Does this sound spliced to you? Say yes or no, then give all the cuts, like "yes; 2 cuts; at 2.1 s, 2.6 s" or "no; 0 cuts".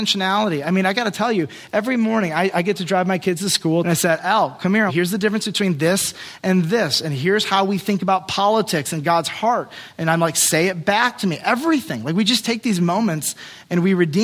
yes; 2 cuts; at 3.8 s, 4.9 s